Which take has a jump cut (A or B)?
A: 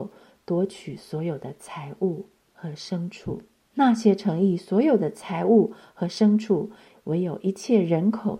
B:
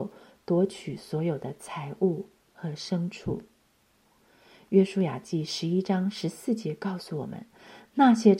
A